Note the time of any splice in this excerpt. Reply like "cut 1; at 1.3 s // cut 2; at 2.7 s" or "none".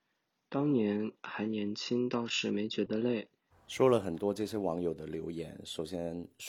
cut 1; at 3.5 s